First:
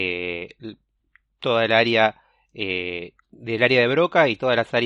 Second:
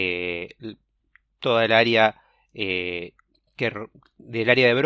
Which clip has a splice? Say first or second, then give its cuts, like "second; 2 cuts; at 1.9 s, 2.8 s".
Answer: first; 1 cut; at 3.2 s